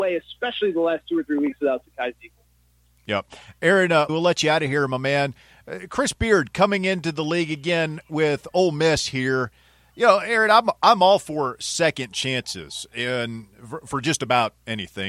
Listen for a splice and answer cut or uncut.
cut